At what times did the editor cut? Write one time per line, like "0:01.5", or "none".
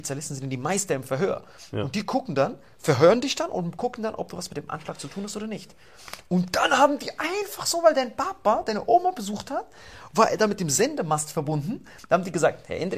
none